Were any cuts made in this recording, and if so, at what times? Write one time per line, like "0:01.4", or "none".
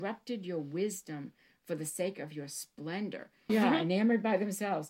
0:03.5